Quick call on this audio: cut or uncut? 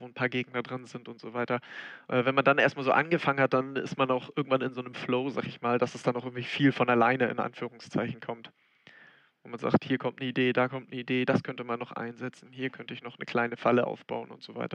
uncut